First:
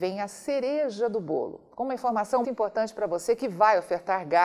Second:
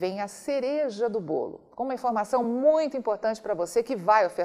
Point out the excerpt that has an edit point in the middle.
first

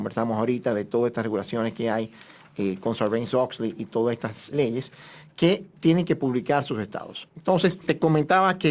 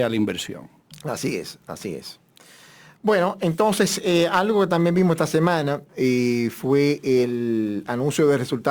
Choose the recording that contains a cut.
first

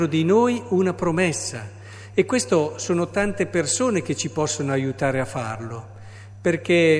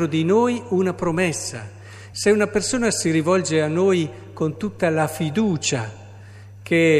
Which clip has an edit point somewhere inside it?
second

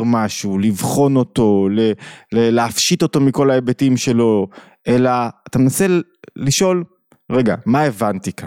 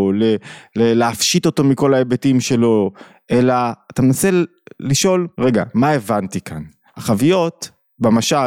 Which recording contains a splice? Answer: second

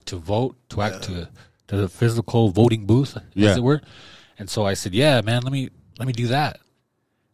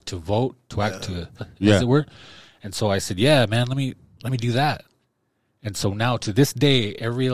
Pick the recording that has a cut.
second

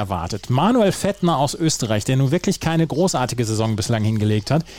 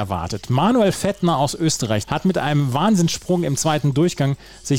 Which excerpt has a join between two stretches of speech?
second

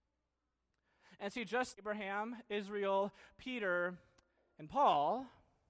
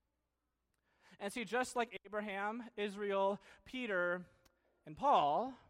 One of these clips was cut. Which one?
first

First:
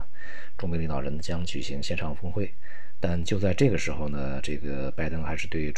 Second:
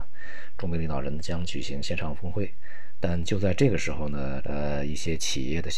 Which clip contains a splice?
second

